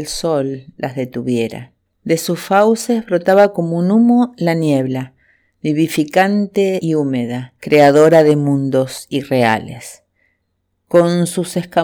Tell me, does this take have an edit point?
yes; 1 cut; at 1.9 s

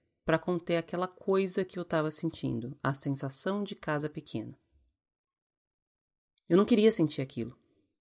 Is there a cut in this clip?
no; 0 cuts

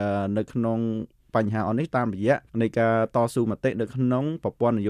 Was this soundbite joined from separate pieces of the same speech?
yes; 1 cut; at 2.5 s

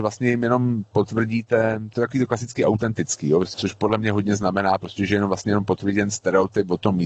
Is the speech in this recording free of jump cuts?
no; 1 cut; at 3.5 s

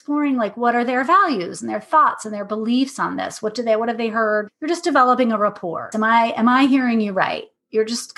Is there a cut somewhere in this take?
yes; 2 cuts; at 4.5 s, 5.9 s

